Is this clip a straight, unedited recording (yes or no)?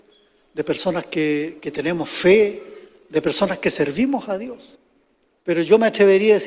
no